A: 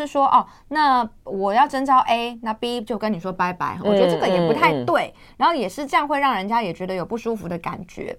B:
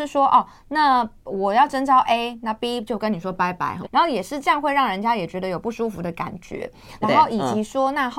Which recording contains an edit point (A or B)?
B